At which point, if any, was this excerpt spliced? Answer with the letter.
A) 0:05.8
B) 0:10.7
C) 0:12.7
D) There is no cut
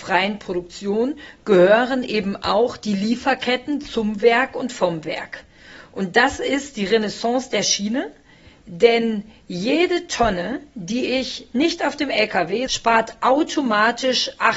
C